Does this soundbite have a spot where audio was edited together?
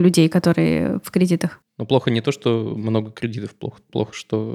no; 0 cuts

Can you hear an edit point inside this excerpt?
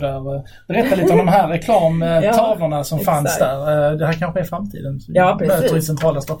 no; 0 cuts

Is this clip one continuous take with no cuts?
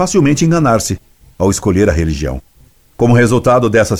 yes; 0 cuts

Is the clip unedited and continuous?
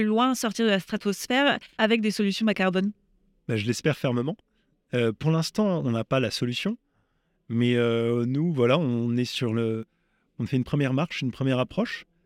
yes; 0 cuts

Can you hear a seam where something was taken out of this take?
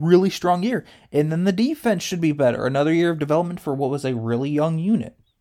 no; 0 cuts

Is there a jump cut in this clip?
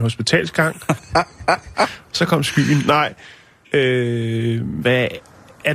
yes; 3 cuts; at 1.0 s, 3.6 s, 4.8 s

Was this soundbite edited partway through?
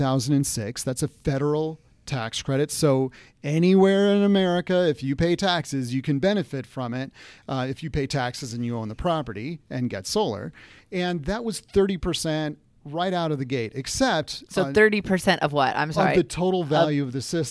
no; 0 cuts

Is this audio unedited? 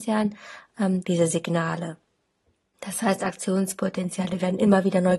no; 1 cut; at 1.0 s

